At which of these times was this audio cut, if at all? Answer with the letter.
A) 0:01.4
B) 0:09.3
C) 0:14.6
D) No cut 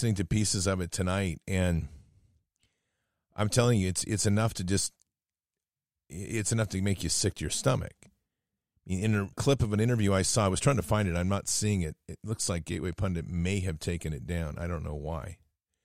B